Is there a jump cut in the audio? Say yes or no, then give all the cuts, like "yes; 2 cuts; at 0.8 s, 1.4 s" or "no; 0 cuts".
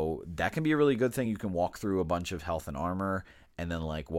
no; 0 cuts